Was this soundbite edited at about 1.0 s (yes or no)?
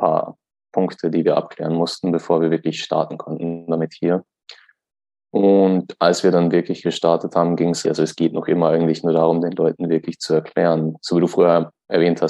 no